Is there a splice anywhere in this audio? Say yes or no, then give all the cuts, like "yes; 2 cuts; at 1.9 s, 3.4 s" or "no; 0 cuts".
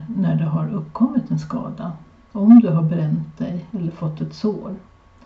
yes; 1 cut; at 3.7 s